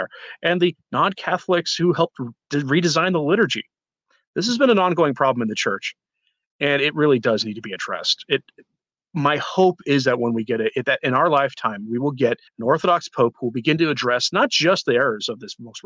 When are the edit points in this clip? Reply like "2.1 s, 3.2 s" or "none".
12.5 s